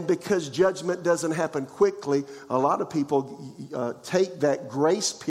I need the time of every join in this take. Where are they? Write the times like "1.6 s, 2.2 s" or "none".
none